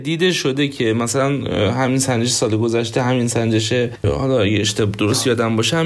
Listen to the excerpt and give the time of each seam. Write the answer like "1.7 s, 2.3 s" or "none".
none

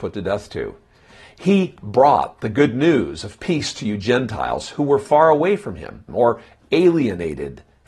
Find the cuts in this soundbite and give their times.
6.1 s

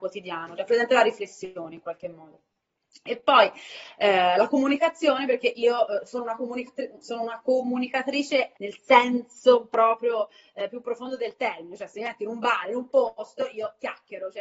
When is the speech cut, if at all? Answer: 8.5 s, 12.6 s

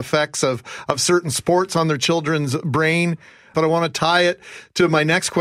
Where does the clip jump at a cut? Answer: 3.5 s

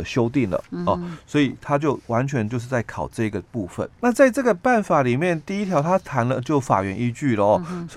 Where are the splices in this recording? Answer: 3.9 s

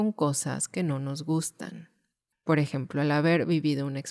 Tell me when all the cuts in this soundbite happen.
2.3 s

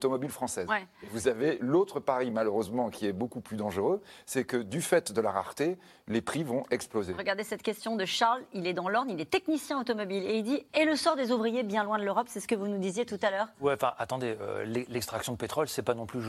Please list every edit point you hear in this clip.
10.7 s

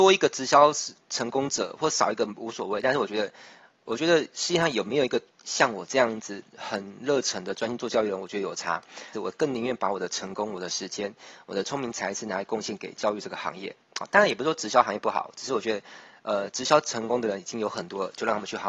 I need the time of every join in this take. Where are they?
9.1 s

